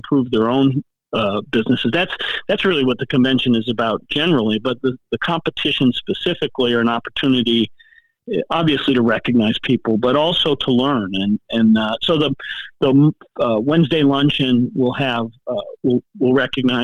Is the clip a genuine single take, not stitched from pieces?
yes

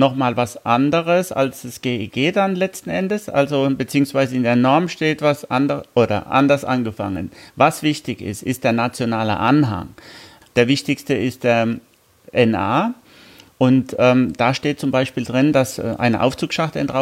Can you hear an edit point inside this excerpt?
yes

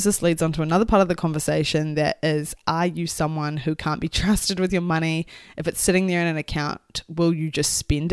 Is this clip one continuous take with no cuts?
yes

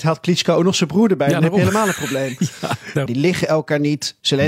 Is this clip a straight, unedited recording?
no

